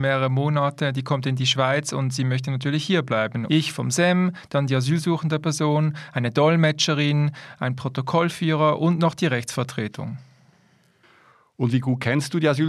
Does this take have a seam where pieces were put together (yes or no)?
yes